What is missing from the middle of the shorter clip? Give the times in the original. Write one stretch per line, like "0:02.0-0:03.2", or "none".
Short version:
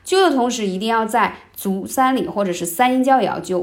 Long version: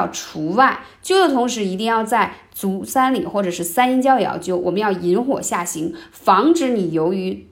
none